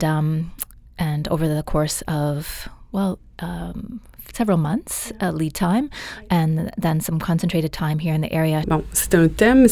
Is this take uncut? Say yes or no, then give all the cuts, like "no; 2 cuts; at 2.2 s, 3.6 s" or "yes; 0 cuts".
no; 1 cut; at 8.6 s